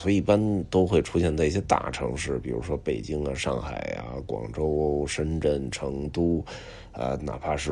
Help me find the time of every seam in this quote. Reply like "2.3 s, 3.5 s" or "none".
none